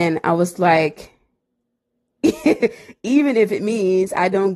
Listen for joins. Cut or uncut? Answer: uncut